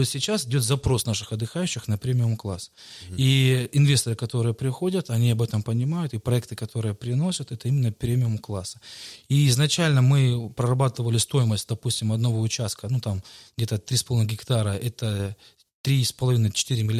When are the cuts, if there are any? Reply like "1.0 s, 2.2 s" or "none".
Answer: none

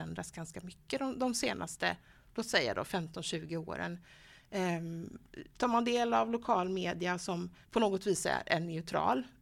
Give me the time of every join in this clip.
7.6 s

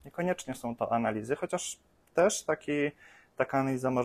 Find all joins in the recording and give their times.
none

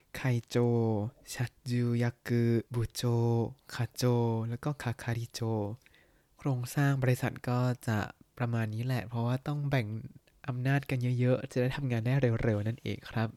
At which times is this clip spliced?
1.6 s, 2.7 s

